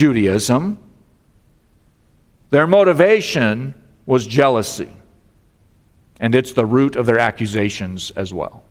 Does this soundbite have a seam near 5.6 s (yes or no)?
no